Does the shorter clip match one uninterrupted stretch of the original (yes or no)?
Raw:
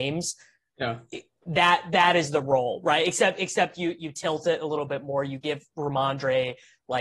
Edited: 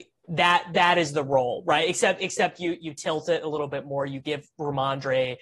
yes